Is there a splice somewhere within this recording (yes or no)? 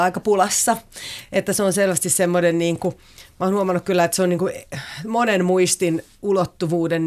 no